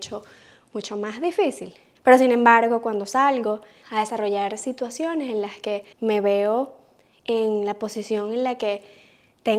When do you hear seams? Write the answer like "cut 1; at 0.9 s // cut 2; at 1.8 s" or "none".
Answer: cut 1; at 2.0 s // cut 2; at 3.8 s // cut 3; at 5.9 s